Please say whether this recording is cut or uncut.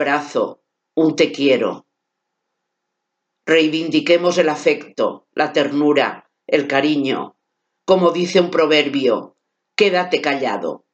cut